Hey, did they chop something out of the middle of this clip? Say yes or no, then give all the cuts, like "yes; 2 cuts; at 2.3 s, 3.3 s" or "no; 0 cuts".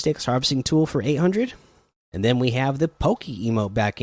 yes; 1 cut; at 2.0 s